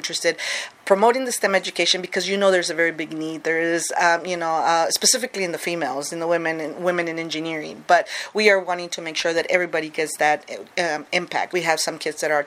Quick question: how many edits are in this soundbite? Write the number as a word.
one